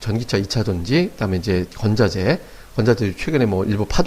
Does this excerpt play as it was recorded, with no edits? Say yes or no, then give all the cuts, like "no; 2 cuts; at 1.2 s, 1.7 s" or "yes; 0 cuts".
yes; 0 cuts